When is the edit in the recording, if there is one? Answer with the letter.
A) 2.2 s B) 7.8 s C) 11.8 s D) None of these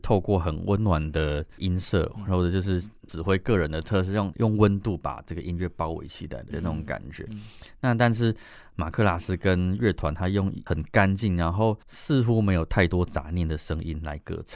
C